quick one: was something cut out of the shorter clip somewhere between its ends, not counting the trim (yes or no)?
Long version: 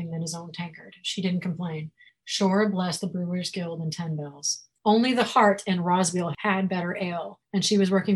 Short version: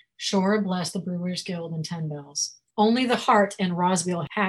no